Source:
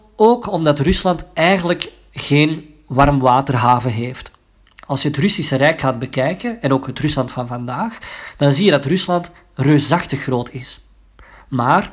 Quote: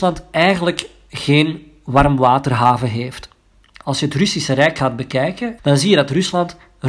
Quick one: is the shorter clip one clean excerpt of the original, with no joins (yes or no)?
no